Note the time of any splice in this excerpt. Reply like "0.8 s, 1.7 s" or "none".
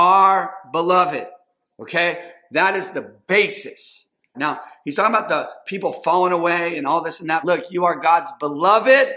4.3 s, 7.4 s